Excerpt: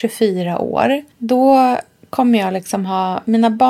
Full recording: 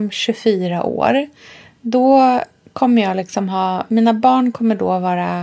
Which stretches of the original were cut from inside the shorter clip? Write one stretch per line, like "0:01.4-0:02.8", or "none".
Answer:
0:01.4-0:01.7